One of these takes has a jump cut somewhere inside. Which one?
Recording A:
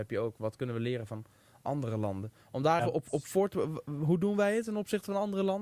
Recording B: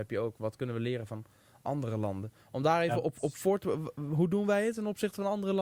A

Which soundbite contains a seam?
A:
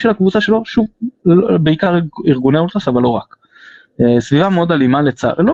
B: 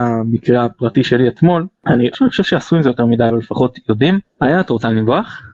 B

